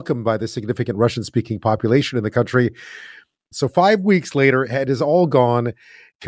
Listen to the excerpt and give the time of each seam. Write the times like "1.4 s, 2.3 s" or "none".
3.5 s